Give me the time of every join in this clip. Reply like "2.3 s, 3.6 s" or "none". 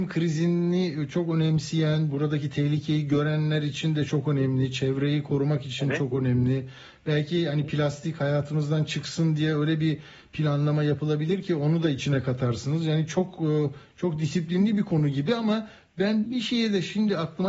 16.2 s